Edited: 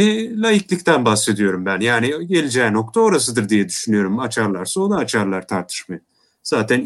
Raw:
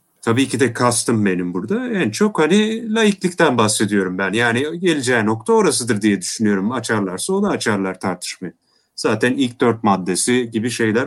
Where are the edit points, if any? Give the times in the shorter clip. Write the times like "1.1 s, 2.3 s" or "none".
none